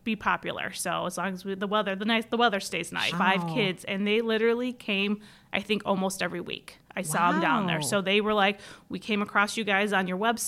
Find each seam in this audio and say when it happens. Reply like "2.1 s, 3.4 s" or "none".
3.1 s